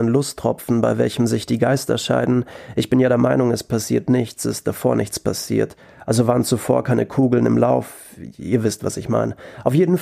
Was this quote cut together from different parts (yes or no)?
no